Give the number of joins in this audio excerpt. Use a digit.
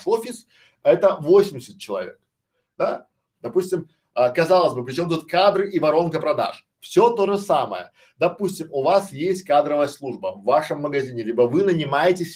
1